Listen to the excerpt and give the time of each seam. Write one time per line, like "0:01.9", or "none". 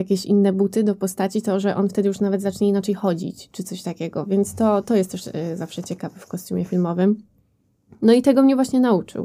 none